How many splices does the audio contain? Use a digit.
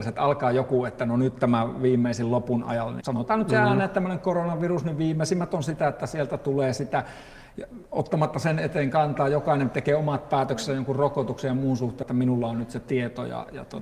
2